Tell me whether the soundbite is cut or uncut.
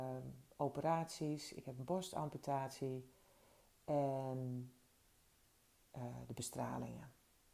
uncut